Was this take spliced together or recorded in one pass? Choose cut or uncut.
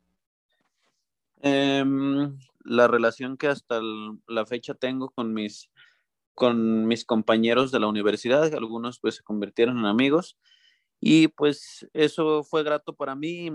cut